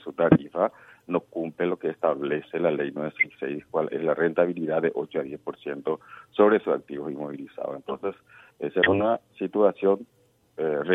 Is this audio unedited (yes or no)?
yes